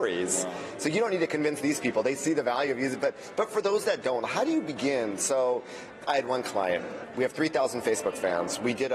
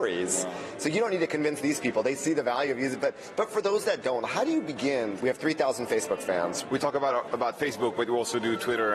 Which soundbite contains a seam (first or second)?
second